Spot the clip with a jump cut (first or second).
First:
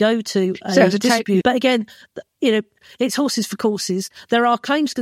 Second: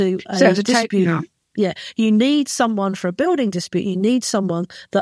first